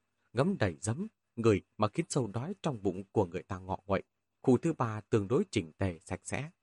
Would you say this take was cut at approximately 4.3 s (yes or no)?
yes